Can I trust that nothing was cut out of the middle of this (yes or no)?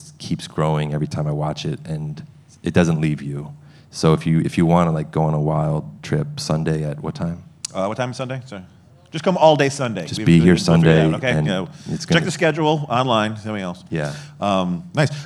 yes